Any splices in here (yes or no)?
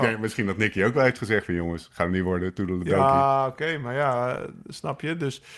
no